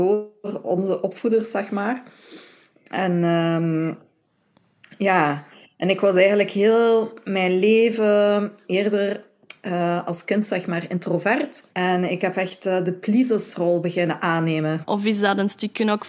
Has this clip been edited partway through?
yes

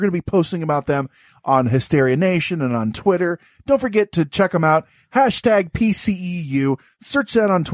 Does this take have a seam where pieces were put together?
no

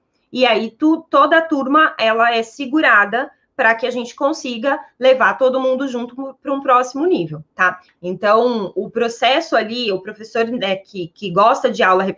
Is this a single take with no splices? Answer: no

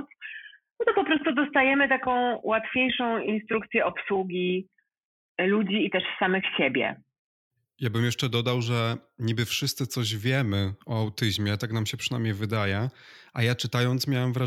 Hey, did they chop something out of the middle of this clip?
no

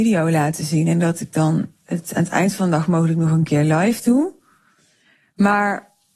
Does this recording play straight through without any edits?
yes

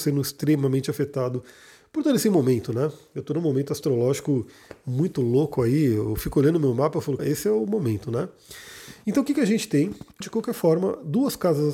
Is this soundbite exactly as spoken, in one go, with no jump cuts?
no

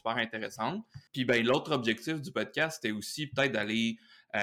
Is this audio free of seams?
no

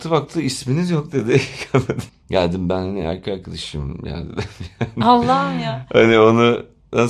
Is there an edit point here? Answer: yes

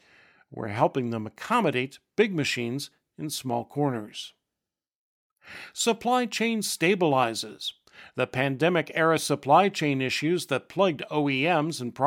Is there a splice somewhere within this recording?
no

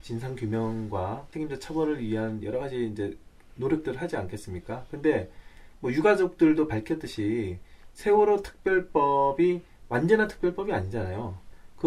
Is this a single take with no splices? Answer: yes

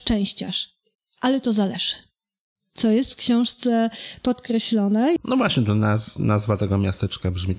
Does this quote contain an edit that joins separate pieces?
yes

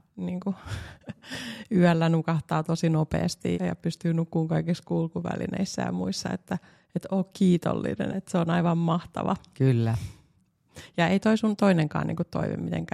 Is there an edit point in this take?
yes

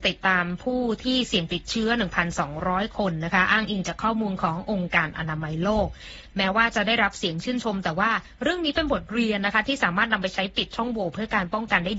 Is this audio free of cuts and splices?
yes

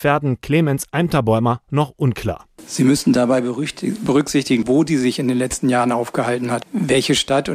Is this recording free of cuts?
no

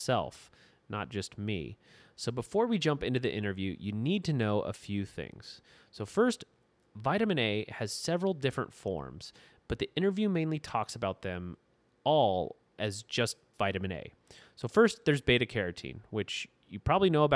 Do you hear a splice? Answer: no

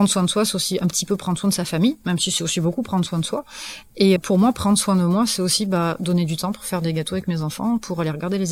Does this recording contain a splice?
yes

